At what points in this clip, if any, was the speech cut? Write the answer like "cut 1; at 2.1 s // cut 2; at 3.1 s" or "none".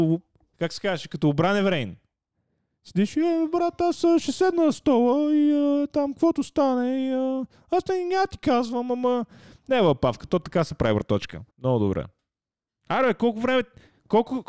cut 1; at 11.5 s